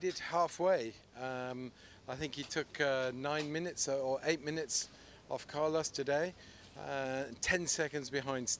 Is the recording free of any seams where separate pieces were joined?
yes; 0 cuts

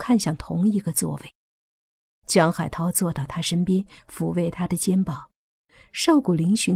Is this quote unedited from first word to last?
yes; 0 cuts

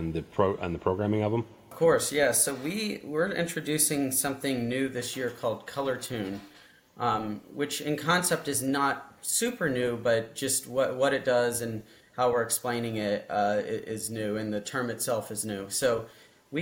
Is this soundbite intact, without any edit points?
yes; 0 cuts

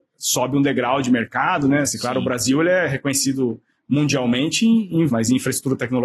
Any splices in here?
yes; 2 cuts; at 1.8 s, 5.1 s

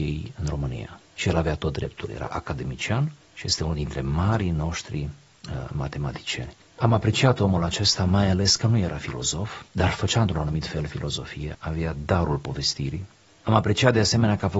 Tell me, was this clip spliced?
yes; 2 cuts; at 9.7 s, 11.5 s

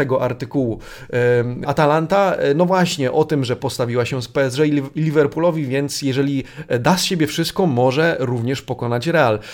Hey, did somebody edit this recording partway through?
yes; 1 cut; at 1.6 s

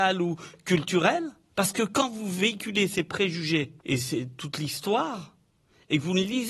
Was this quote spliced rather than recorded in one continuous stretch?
yes; 2 cuts; at 1.5 s, 3.8 s

